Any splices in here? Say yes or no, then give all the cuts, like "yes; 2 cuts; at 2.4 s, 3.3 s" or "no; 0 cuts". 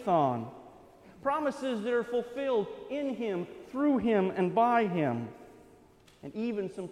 no; 0 cuts